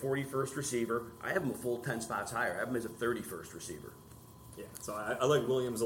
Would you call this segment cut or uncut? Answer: uncut